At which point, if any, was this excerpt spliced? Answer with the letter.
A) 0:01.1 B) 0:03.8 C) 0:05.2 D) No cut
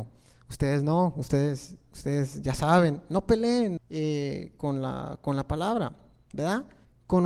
B